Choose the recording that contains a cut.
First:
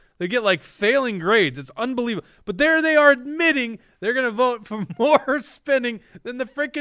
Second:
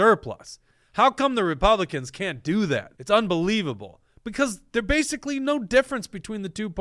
second; 1 cut; at 3.0 s

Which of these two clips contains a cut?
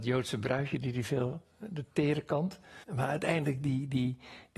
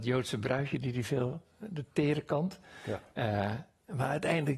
first; 1 cut; at 2.8 s

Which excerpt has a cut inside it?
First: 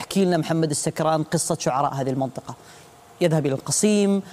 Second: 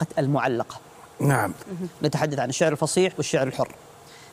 second; 2 cuts; at 1.6 s, 3.1 s

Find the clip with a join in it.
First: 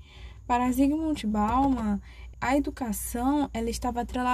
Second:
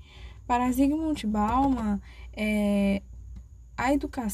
first; 1 cut; at 2.3 s

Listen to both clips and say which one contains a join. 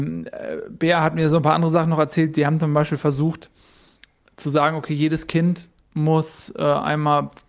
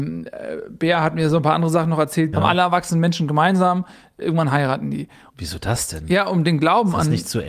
second; 2 cuts; at 2.3 s, 5.3 s

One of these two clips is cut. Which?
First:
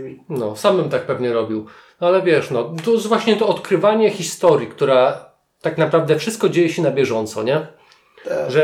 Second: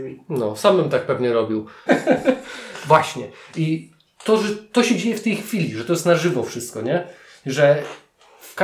second; 2 cuts; at 1.9 s, 4.1 s

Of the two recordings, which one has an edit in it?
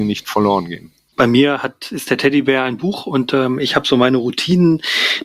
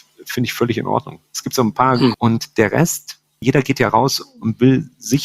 second; 2 cuts; at 2.1 s, 3.4 s

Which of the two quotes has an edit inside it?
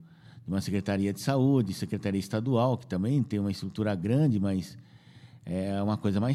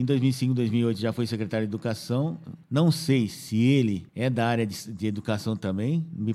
second; 2 cuts; at 2.6 s, 4.1 s

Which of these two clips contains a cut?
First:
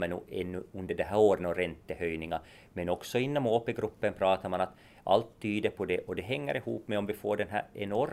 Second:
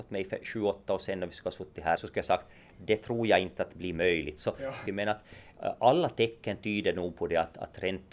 second; 2 cuts; at 2.0 s, 4.9 s

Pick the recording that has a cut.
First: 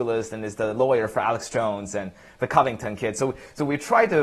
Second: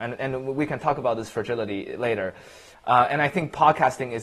second; 1 cut; at 2.7 s

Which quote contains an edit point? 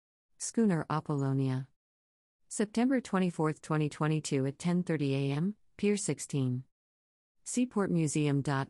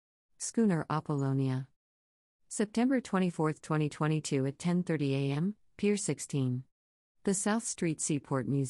second; 1 cut; at 7.1 s

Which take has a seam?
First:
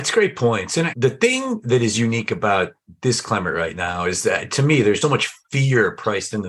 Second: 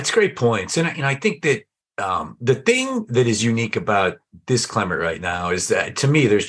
first; 2 cuts; at 0.9 s, 5.0 s

